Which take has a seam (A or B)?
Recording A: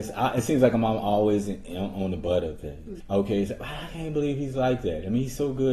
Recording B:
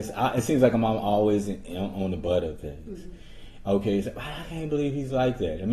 A